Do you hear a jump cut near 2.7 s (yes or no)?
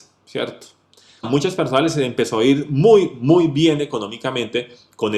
no